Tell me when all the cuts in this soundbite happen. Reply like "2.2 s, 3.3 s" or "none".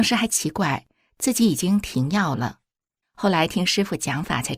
3.0 s